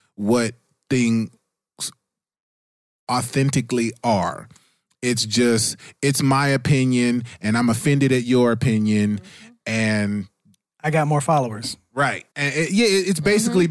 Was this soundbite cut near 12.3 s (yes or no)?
yes